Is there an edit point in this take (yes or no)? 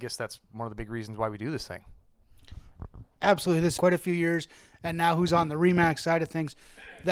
yes